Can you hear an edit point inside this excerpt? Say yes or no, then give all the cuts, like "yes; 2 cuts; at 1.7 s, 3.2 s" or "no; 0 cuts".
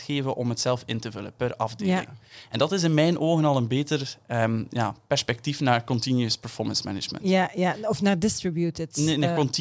no; 0 cuts